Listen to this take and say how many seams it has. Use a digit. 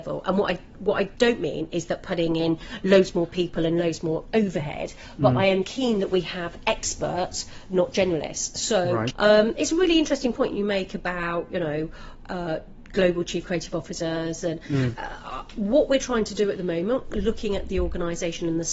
1